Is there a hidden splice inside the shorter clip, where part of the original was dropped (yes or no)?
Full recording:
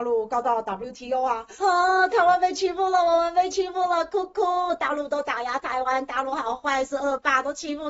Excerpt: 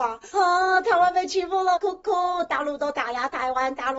yes